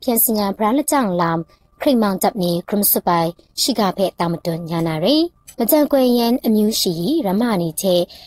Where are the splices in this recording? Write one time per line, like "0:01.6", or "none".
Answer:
0:05.5

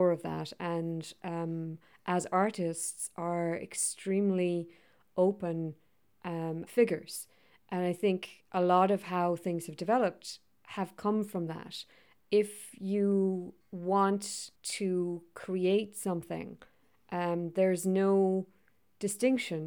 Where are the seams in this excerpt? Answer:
0:06.7
0:12.2
0:14.5

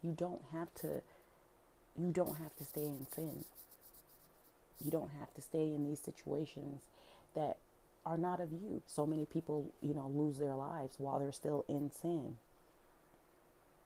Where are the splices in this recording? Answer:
0:08.8

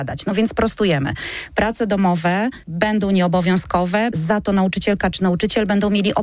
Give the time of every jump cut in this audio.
0:02.6
0:04.1

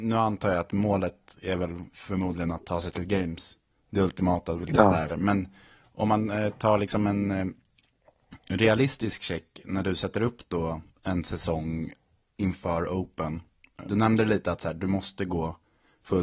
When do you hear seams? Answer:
0:05.1
0:13.9

